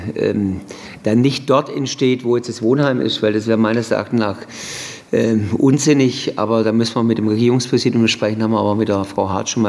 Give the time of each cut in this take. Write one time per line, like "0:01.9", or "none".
none